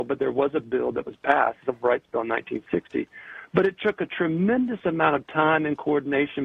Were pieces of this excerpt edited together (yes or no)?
no